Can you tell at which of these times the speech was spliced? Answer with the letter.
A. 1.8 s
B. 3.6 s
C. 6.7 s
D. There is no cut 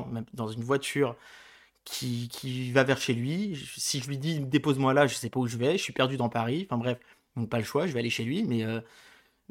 D